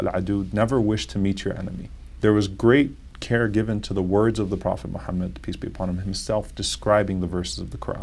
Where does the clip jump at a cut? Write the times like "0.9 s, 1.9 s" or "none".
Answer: 2.2 s